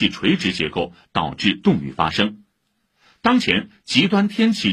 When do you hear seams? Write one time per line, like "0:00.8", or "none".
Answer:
none